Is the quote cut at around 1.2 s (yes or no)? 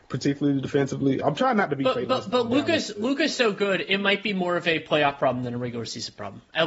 yes